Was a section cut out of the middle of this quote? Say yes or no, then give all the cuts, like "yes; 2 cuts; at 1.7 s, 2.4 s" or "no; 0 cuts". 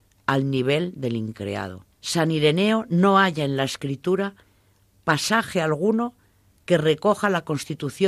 yes; 1 cut; at 1.9 s